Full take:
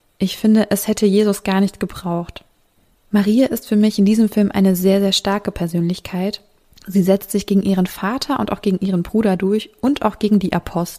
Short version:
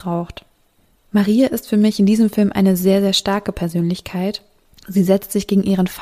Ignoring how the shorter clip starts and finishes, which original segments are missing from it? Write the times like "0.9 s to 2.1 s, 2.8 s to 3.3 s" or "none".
none

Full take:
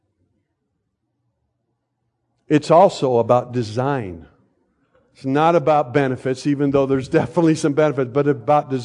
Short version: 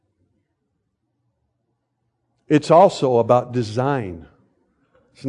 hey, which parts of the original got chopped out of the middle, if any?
none

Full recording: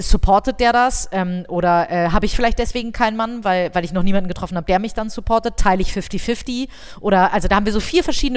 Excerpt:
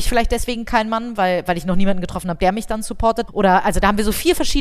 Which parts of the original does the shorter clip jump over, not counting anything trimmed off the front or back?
5.5 s to 7.0 s

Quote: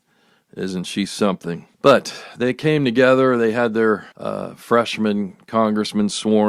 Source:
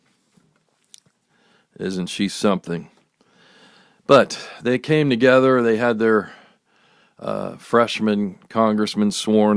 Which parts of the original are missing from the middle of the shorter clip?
3.0 s to 4.0 s, 6.4 s to 7.1 s

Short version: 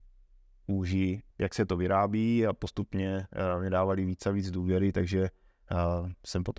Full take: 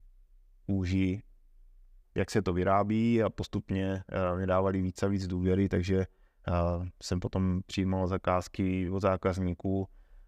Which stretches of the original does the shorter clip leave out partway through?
1.3 s to 2.1 s

